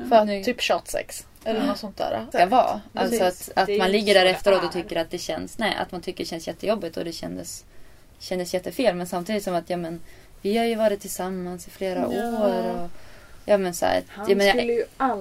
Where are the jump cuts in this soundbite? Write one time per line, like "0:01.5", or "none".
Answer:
0:02.3